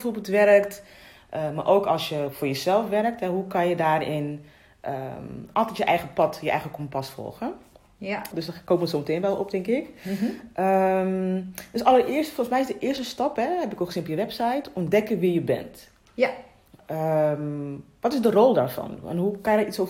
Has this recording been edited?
yes; 1 cut; at 8.3 s

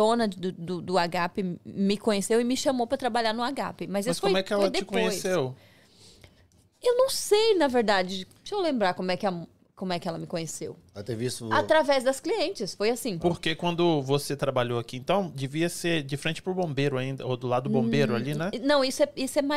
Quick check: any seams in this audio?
no; 0 cuts

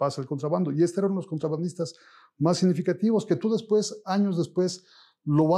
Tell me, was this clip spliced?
no; 0 cuts

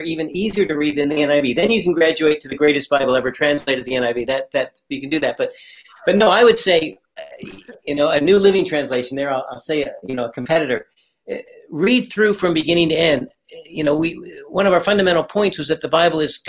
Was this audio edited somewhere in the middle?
no; 0 cuts

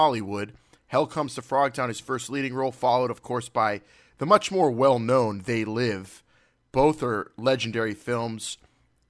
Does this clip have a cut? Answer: no; 0 cuts

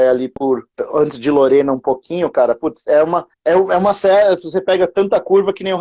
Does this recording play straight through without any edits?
yes; 0 cuts

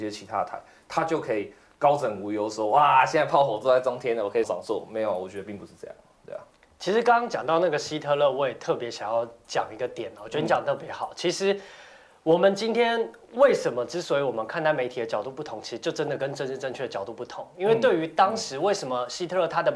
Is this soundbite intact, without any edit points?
no; 1 cut; at 4.4 s

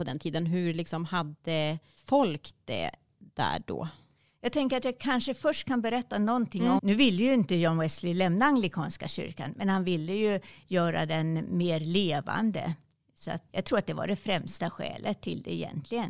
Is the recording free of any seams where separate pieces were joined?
no; 2 cuts; at 6.8 s, 13.5 s

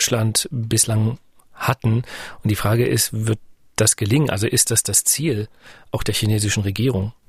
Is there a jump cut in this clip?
no; 0 cuts

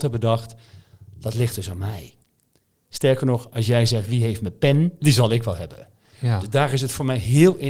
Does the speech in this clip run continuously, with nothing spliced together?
no; 1 cut; at 5.0 s

